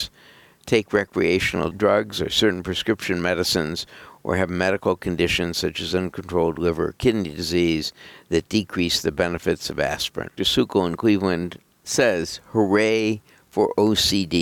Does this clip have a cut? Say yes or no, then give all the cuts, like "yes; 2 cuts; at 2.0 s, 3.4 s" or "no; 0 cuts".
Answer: yes; 1 cut; at 10.4 s